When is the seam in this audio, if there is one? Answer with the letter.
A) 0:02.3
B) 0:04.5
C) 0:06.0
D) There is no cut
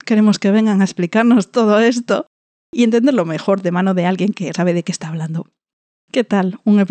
B